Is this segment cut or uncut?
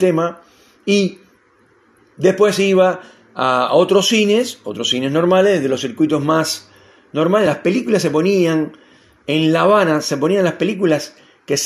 uncut